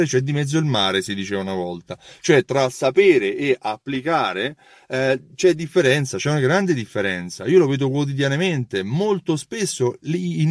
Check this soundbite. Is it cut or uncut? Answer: uncut